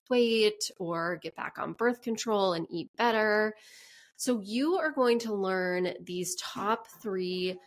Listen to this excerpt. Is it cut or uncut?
uncut